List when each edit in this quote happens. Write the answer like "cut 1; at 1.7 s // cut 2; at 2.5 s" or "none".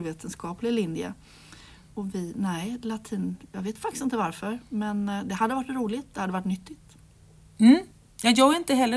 none